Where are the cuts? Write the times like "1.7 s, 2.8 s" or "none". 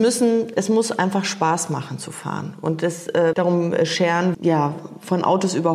3.3 s, 4.3 s